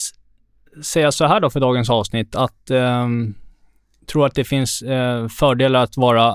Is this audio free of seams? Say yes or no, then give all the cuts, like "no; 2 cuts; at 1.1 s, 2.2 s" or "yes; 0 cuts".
yes; 0 cuts